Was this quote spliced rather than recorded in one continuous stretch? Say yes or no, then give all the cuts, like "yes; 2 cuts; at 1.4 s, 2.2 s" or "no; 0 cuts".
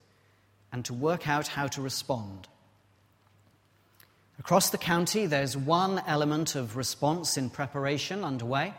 no; 0 cuts